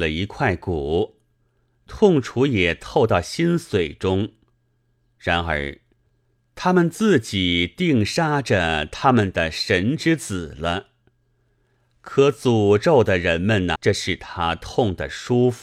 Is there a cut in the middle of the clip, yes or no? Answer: yes